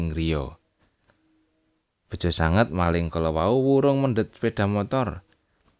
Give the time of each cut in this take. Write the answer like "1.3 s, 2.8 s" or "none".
none